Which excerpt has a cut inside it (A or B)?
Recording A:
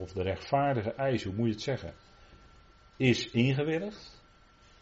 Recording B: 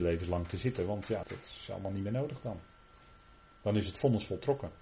B